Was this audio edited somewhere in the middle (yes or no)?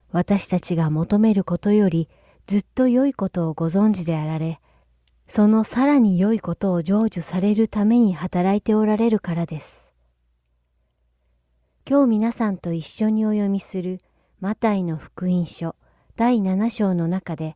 no